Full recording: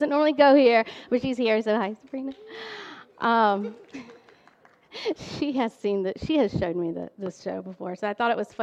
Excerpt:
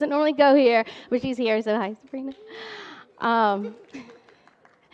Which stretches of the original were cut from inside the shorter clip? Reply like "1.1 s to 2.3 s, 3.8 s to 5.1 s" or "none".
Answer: none